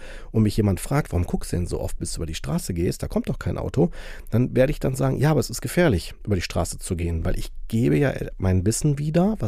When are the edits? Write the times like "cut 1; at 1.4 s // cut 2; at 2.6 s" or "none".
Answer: none